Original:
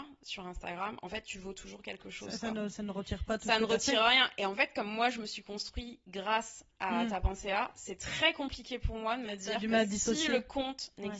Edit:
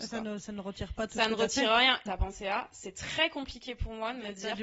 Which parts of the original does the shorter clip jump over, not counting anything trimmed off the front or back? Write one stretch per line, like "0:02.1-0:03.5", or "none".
0:04.4-0:07.1